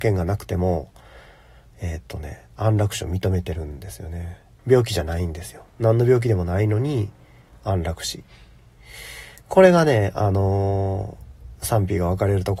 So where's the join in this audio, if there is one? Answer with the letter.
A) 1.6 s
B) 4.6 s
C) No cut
B